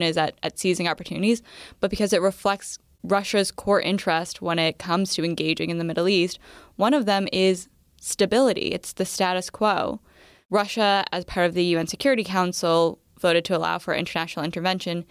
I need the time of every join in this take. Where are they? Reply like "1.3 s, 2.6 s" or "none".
none